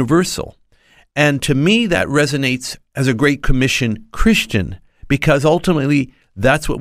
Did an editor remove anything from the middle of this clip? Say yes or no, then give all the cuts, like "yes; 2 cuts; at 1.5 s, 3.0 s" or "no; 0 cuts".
no; 0 cuts